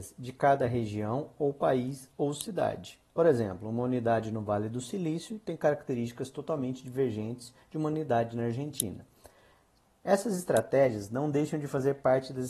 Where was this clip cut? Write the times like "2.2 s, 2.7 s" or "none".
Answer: none